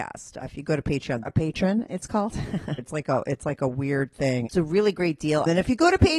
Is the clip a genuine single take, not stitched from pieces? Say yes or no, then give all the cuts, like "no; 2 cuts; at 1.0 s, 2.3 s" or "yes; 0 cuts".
no; 3 cuts; at 1.2 s, 2.8 s, 4.5 s